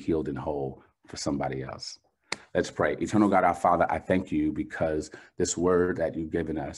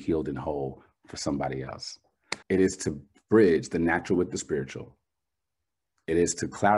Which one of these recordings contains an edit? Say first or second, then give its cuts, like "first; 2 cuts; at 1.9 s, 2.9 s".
second; 1 cut; at 2.4 s